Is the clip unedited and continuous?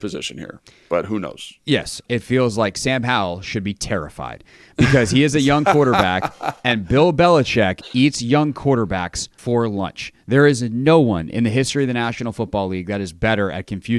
no; 2 cuts; at 2.1 s, 9.4 s

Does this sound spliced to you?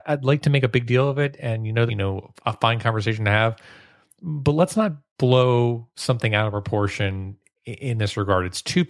yes; 1 cut; at 1.9 s

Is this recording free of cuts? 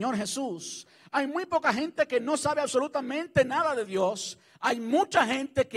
yes; 0 cuts

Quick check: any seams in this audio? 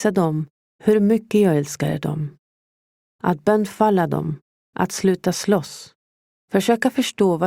no; 0 cuts

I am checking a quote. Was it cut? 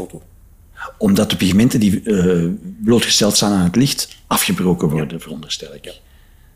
no; 0 cuts

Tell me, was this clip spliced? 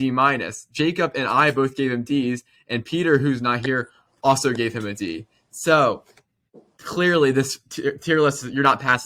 no; 0 cuts

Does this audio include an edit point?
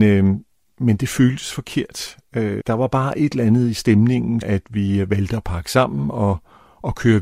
yes; 2 cuts; at 2.6 s, 4.4 s

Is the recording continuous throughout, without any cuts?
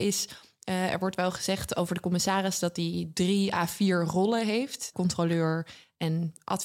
no; 1 cut; at 4.9 s

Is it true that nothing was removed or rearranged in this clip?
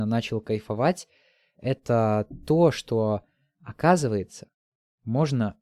yes; 0 cuts

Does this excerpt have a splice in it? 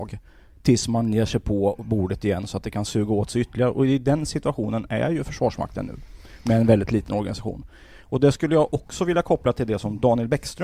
no; 0 cuts

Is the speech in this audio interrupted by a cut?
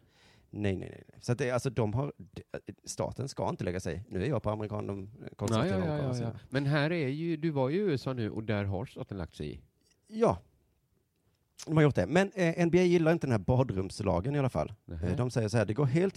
no; 0 cuts

